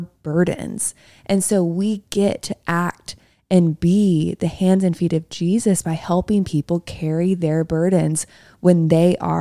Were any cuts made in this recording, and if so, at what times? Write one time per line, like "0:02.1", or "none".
none